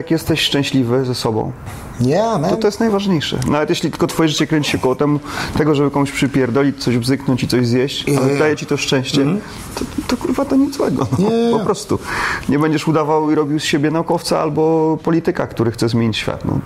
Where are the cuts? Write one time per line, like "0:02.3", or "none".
none